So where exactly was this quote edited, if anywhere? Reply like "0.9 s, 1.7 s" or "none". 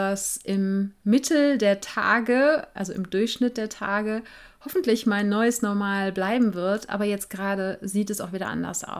none